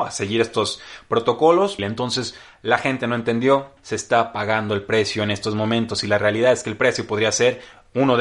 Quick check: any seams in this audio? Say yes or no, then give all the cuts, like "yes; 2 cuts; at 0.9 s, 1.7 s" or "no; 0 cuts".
yes; 2 cuts; at 1.8 s, 3.8 s